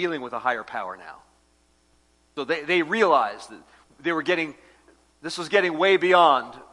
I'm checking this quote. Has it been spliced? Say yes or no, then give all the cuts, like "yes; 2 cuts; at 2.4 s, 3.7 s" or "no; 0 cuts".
no; 0 cuts